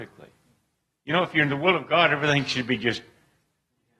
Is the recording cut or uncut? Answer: uncut